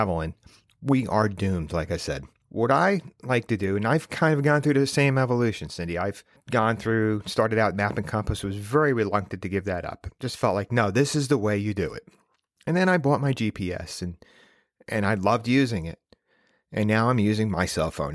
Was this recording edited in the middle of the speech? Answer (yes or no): no